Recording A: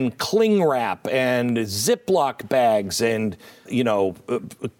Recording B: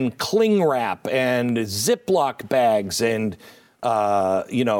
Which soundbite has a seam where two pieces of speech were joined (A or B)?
A